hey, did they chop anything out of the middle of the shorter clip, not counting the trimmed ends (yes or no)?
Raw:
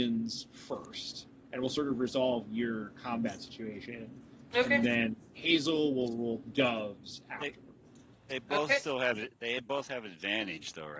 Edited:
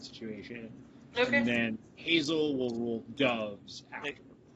no